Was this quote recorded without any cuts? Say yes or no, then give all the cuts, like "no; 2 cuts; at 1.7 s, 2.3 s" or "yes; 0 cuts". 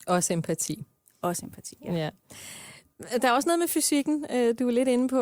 yes; 0 cuts